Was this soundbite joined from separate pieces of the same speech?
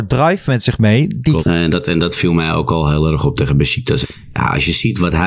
yes; 2 cuts; at 1.4 s, 4.0 s

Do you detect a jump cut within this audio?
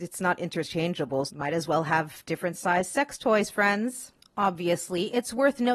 yes; 1 cut; at 1.3 s

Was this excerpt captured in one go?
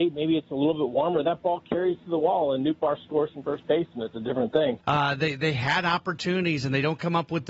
no; 1 cut; at 4.8 s

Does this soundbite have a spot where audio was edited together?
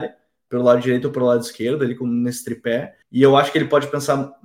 yes; 1 cut; at 3.0 s

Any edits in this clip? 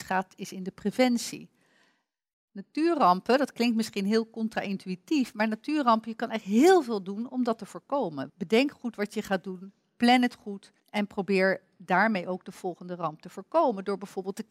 yes; 2 cuts; at 8.3 s, 10.8 s

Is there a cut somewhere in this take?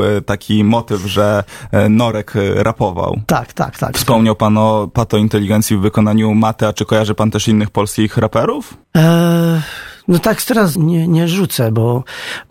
yes; 3 cuts; at 3.9 s, 8.8 s, 10.7 s

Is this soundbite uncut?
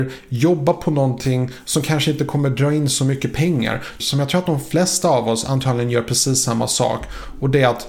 no; 1 cut; at 4.0 s

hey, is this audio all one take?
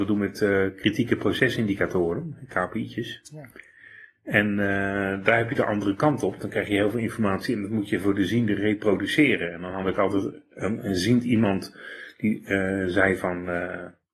yes; 0 cuts

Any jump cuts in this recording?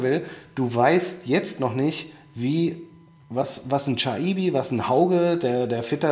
no; 0 cuts

